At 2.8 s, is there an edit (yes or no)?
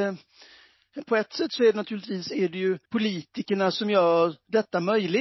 yes